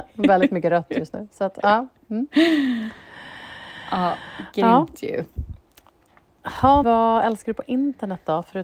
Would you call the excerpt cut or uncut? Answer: cut